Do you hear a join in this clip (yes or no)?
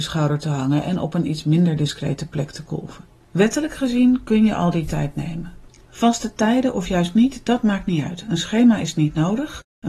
no